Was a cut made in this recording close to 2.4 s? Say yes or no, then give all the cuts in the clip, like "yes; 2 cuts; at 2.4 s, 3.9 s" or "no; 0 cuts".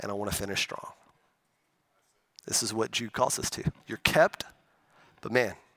no; 1 cut; at 3.8 s